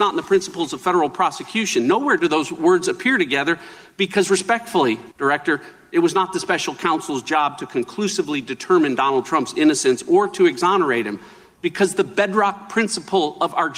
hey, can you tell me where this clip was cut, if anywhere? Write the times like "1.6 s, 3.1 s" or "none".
none

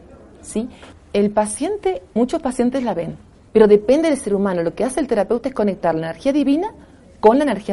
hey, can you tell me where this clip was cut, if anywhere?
0.9 s, 3.5 s

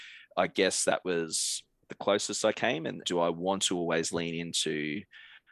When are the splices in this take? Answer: 3.0 s

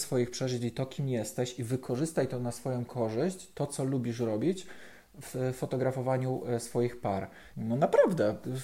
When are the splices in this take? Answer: 7.5 s

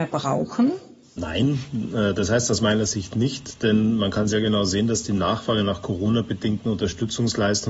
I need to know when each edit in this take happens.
none

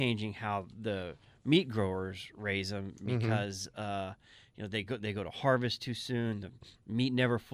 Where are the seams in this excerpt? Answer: none

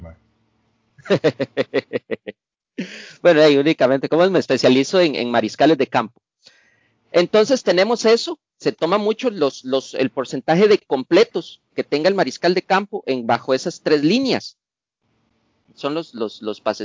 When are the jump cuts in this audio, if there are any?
15.7 s

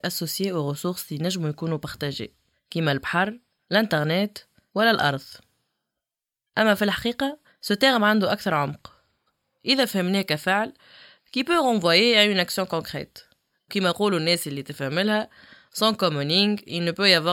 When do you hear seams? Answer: none

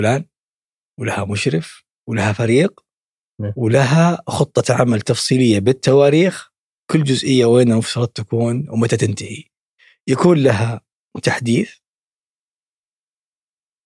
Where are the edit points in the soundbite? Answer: none

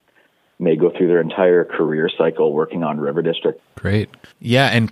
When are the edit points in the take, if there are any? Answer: 3.6 s

